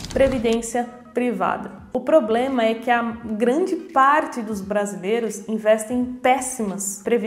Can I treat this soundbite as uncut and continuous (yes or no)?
no